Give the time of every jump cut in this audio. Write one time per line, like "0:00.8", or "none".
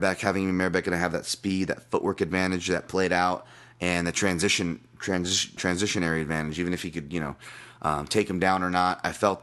0:05.6